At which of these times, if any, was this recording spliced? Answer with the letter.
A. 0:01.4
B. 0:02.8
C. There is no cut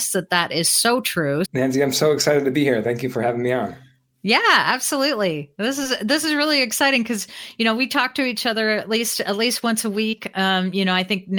A